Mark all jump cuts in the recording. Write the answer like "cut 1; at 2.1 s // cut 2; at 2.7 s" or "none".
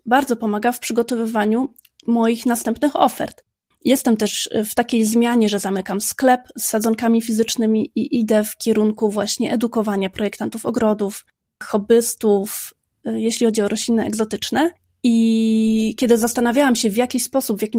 cut 1; at 3.7 s

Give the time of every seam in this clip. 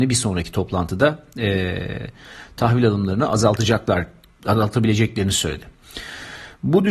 none

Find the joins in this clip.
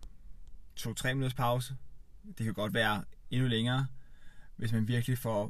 none

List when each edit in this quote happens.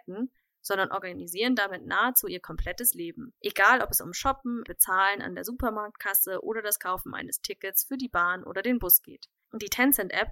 cut 1; at 3.4 s // cut 2; at 4.7 s

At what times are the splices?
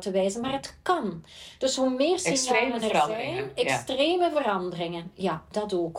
none

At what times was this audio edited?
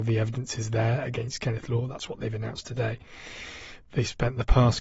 cut 1; at 3.9 s

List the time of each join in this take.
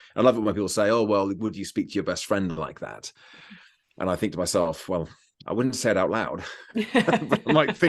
none

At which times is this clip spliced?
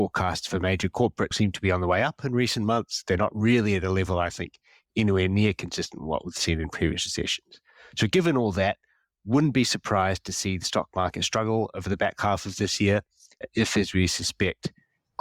cut 1; at 1.3 s

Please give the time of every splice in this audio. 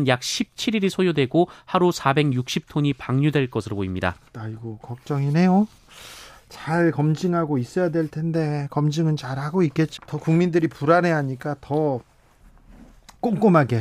cut 1; at 10.0 s

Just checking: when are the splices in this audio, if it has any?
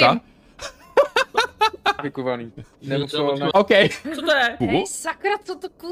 cut 1; at 2.0 s // cut 2; at 3.5 s // cut 3; at 4.6 s

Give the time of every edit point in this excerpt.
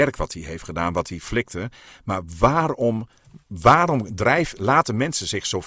cut 1; at 3.4 s

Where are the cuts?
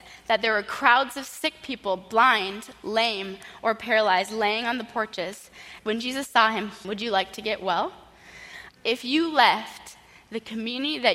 cut 1; at 5.8 s // cut 2; at 6.8 s // cut 3; at 8.7 s

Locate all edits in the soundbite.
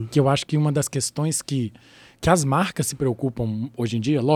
none

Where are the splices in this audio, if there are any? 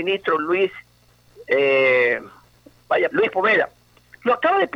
cut 1; at 3.1 s

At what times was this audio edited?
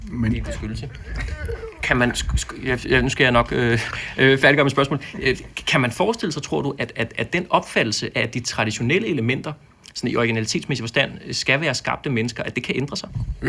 none

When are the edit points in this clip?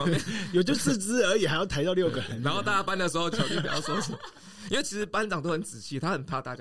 cut 1; at 3.3 s

